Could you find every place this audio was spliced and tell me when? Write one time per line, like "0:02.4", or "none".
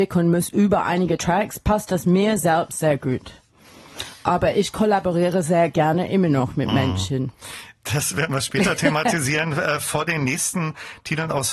none